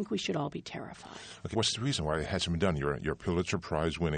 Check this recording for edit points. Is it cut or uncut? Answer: cut